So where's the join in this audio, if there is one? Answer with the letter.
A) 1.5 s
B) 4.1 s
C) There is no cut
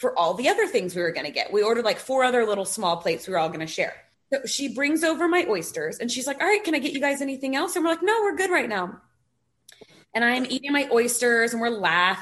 B